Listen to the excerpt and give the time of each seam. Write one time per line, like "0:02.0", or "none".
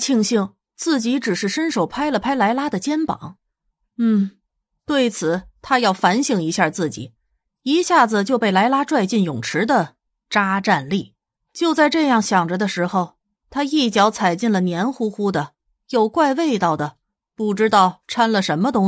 0:11.4